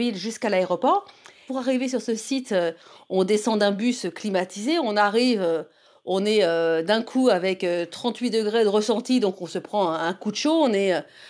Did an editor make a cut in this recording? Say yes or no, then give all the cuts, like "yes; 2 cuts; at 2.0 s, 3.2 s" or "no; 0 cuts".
no; 0 cuts